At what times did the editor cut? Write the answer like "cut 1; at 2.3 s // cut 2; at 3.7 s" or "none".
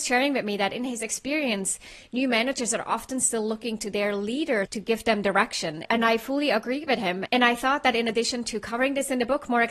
none